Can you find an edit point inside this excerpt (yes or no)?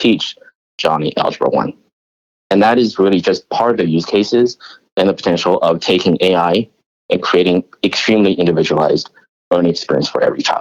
no